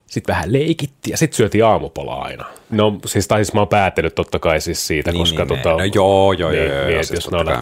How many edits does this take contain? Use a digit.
1